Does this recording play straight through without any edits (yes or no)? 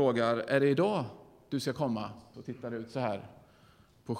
no